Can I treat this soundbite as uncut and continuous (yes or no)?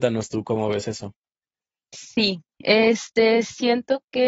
yes